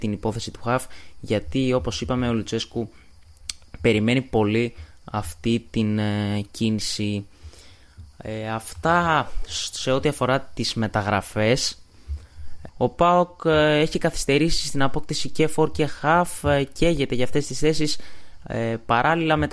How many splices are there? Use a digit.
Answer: 1